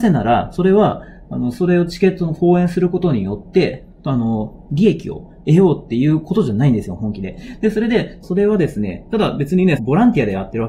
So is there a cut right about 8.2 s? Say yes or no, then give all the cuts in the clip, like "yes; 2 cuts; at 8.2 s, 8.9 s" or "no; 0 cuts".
yes; 2 cuts; at 8.2 s, 9.8 s